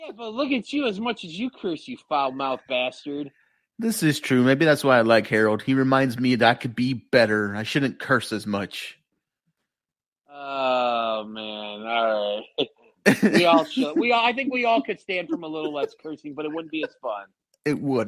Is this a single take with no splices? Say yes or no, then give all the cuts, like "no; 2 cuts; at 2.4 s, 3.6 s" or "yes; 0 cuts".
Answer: yes; 0 cuts